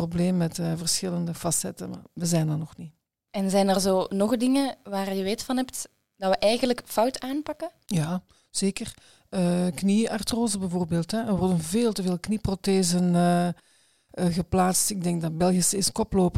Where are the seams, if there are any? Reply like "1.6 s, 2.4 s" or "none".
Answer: none